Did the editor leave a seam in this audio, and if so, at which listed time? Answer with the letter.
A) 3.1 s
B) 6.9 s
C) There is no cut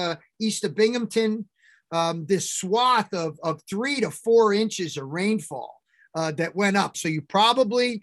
B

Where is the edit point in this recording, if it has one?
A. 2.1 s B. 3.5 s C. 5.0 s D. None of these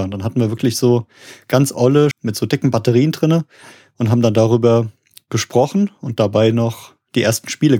A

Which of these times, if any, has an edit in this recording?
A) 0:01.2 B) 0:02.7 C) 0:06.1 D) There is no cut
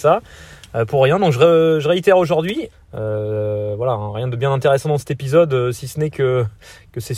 B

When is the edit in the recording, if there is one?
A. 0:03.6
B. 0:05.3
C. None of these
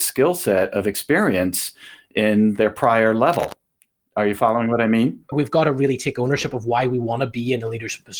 B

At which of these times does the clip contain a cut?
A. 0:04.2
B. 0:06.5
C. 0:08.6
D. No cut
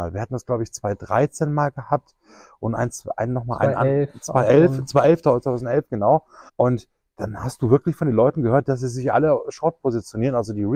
B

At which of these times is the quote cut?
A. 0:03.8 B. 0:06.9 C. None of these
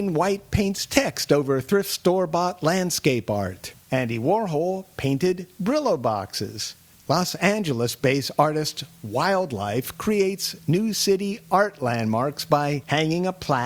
A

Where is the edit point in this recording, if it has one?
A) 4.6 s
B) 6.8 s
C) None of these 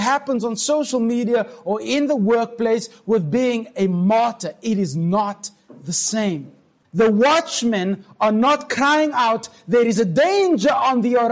B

